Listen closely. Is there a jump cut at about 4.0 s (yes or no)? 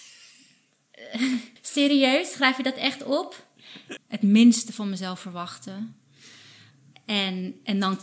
yes